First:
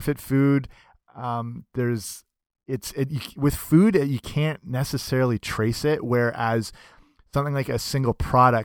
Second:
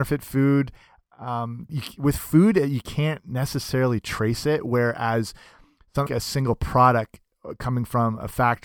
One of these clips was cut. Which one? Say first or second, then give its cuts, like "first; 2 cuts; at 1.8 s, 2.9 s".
second; 2 cuts; at 1.7 s, 6.1 s